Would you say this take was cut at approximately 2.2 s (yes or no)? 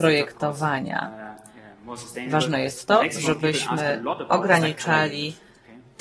no